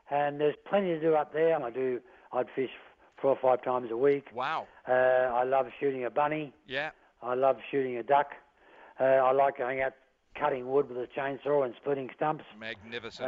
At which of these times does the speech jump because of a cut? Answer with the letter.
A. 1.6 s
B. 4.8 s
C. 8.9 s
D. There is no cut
A